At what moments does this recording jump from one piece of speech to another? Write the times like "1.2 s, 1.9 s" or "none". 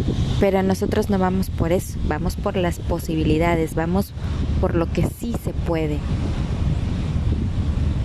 none